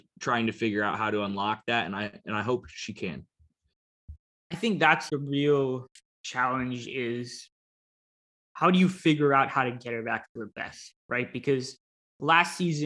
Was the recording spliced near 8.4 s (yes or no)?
no